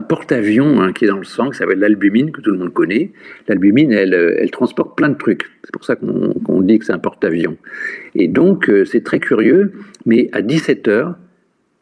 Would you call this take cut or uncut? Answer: uncut